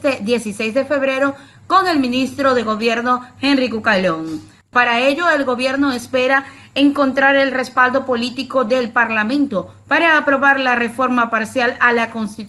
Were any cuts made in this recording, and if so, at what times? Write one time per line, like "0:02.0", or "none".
0:04.7

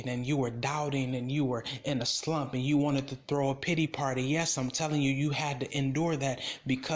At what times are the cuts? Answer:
none

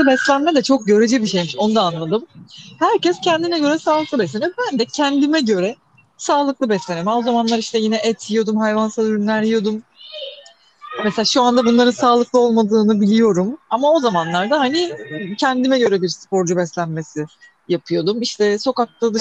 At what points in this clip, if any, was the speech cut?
none

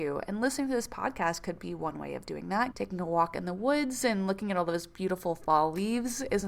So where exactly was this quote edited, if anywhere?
0:02.7

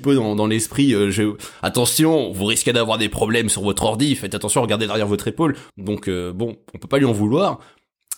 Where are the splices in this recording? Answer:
0:05.7

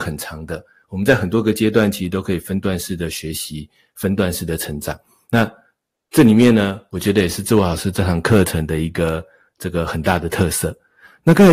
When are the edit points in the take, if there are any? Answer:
none

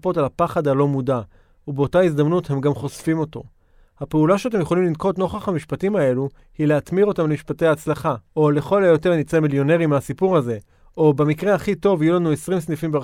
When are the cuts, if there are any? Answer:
0:08.3

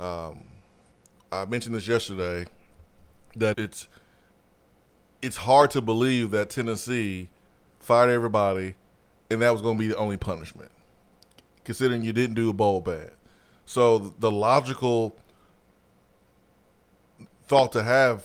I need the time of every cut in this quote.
0:03.5
0:17.3

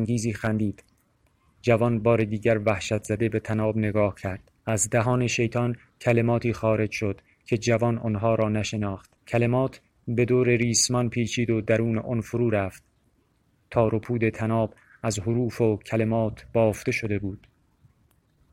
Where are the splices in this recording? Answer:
0:04.6
0:09.2

